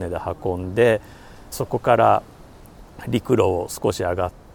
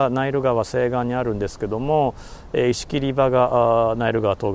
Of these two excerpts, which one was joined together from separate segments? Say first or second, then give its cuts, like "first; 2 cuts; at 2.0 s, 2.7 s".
first; 1 cut; at 1.5 s